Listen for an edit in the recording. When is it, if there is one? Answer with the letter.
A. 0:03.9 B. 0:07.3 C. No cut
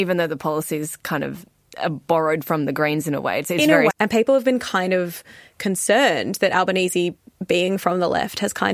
A